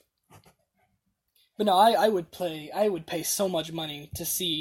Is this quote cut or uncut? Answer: uncut